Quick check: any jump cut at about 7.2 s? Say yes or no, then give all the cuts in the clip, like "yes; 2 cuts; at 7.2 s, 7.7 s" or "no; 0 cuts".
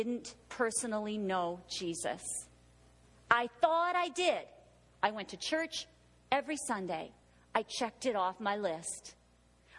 no; 0 cuts